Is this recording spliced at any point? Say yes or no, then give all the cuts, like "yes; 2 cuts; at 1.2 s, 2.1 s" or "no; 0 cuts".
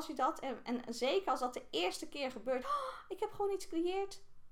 yes; 1 cut; at 2.6 s